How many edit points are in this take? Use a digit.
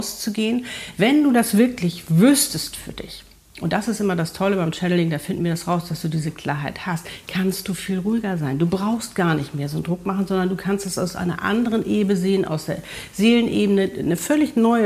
0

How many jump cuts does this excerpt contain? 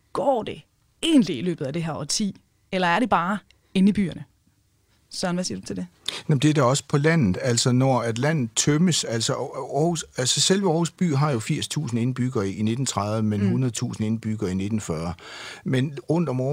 0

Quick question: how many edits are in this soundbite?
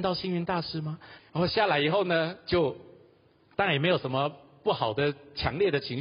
1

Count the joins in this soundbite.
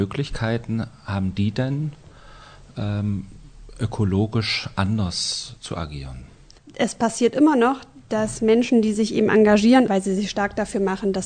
2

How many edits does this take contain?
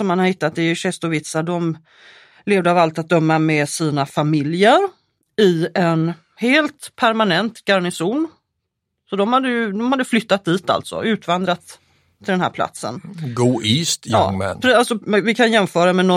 0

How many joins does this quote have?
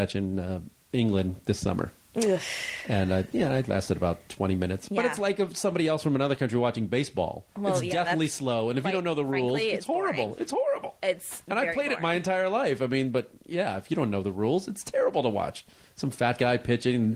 0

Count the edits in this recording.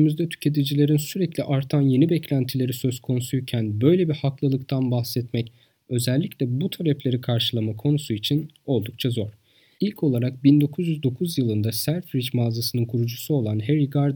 1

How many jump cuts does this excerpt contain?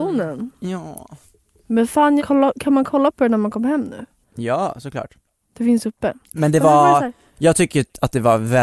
1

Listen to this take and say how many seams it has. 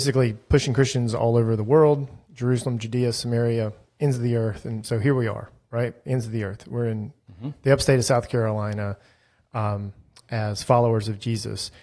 0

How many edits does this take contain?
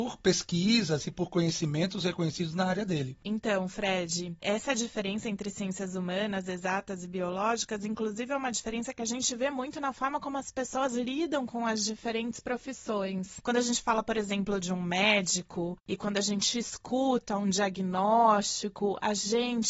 0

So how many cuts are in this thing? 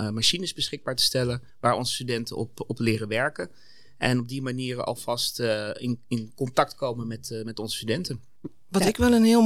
1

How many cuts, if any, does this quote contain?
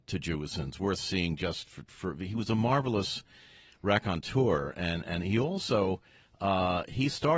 0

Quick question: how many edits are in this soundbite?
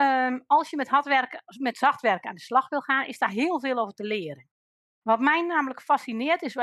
1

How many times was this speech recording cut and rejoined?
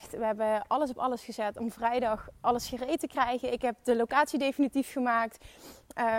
0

